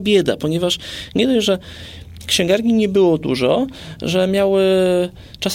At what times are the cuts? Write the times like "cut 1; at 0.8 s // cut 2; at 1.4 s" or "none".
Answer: none